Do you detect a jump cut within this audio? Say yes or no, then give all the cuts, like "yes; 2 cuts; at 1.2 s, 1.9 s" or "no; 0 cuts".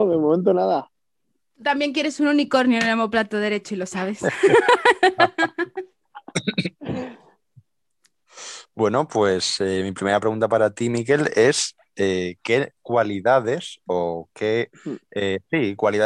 no; 0 cuts